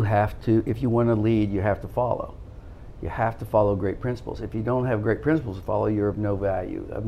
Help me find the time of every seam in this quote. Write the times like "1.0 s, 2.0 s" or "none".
none